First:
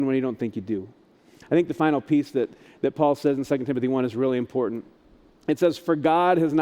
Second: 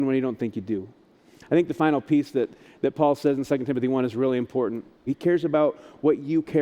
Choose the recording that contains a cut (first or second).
second